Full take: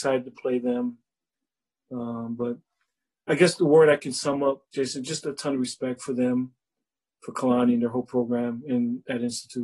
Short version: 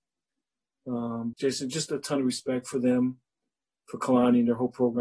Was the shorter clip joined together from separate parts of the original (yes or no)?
yes